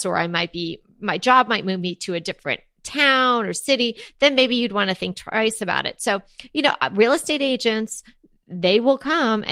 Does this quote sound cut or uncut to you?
uncut